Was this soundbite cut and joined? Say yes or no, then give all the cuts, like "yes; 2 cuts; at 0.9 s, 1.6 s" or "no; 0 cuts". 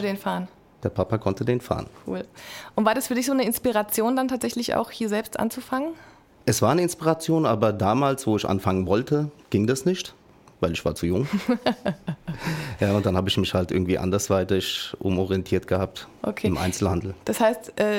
no; 0 cuts